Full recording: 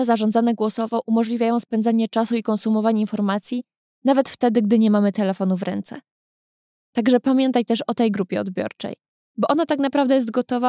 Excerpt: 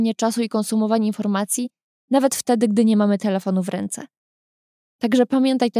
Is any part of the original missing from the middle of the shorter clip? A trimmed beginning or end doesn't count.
no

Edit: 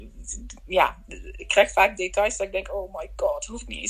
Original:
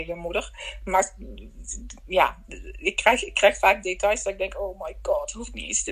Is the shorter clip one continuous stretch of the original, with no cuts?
no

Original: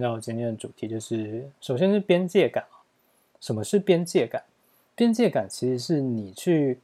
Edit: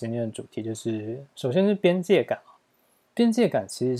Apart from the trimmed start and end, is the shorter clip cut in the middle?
yes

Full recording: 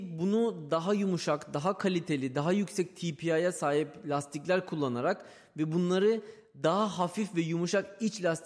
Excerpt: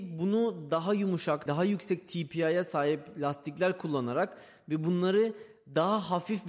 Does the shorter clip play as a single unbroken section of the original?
no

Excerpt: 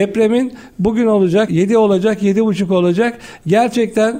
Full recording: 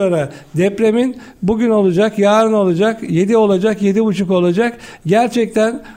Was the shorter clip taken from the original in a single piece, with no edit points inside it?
no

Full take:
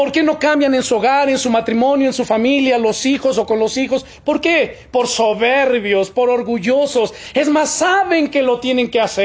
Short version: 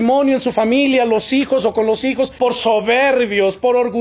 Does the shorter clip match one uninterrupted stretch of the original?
no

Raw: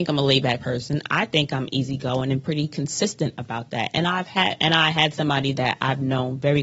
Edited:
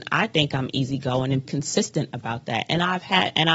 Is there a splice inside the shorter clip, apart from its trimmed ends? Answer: yes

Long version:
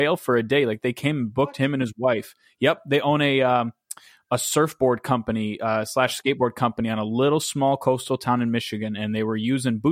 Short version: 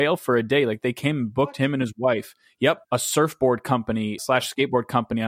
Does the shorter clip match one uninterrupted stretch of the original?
no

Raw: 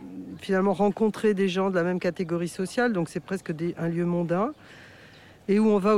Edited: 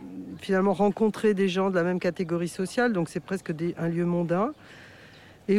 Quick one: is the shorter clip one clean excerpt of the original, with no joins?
yes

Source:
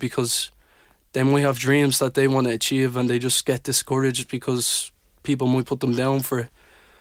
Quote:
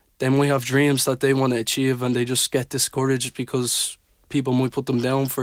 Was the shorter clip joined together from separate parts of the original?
no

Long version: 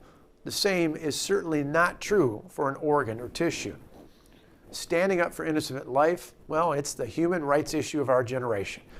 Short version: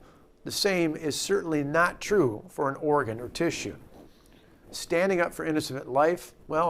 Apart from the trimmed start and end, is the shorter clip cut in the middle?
no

